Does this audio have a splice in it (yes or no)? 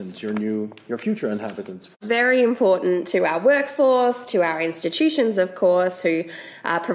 no